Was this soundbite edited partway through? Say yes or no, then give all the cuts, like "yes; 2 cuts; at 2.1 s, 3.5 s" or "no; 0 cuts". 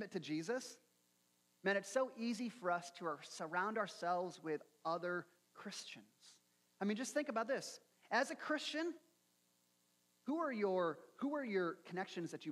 no; 0 cuts